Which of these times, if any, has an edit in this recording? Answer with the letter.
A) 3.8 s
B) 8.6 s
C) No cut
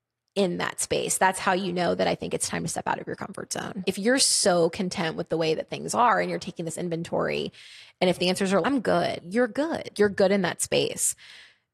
B